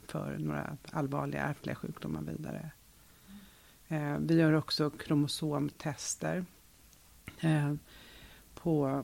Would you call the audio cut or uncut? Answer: uncut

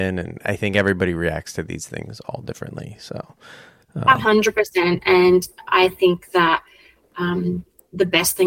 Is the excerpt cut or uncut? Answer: uncut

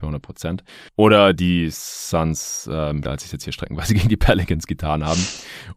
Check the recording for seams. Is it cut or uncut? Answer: cut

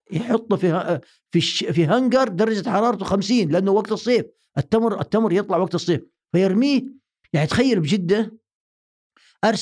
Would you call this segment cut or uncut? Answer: cut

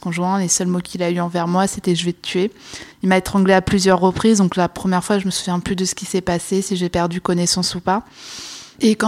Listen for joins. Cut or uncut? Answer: cut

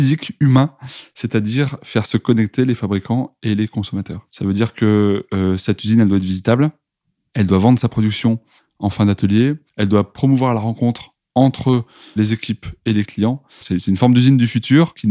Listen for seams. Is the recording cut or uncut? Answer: cut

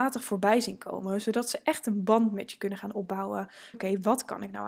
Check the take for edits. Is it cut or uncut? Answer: cut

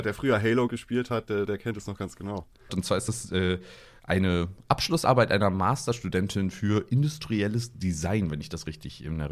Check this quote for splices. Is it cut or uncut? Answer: cut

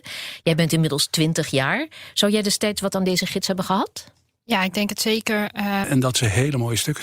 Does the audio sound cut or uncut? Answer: cut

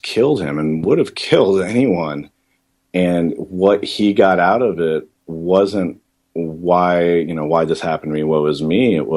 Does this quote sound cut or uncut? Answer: uncut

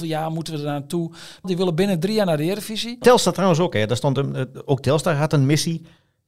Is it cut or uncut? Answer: cut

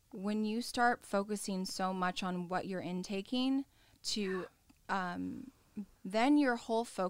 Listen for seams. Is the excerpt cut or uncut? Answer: cut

